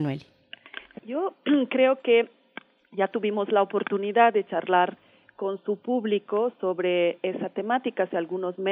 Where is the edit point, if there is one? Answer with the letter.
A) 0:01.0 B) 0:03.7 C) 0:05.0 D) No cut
A